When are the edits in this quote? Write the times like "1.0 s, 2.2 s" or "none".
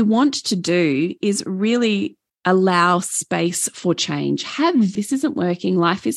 5.0 s